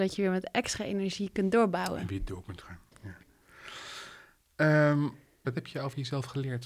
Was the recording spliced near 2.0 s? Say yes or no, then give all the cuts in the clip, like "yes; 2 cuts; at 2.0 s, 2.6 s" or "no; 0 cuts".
no; 1 cut; at 5.4 s